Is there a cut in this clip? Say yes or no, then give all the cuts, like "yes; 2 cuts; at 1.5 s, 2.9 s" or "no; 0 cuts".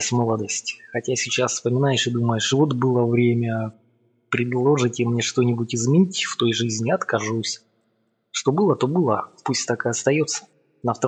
no; 0 cuts